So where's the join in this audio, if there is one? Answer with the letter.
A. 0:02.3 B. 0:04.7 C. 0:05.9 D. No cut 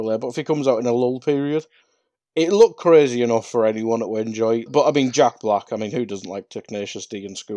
B